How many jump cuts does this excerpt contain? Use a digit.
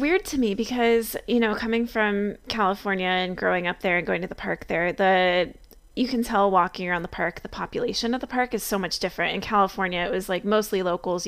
0